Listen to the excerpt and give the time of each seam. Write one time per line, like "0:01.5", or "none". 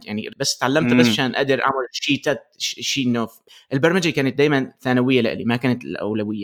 none